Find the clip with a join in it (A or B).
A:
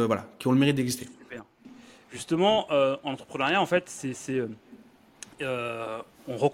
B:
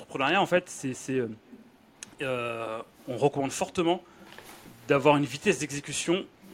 A